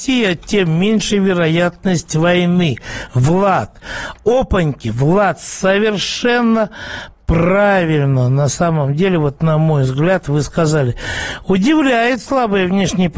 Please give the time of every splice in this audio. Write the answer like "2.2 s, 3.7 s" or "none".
none